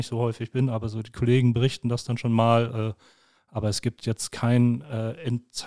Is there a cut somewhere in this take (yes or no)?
no